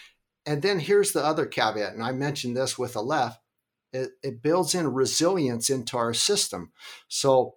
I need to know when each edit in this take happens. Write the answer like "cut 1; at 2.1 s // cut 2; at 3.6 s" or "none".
none